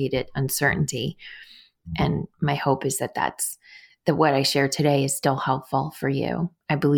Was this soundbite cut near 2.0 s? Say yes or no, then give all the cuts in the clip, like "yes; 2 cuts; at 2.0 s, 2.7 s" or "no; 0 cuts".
no; 0 cuts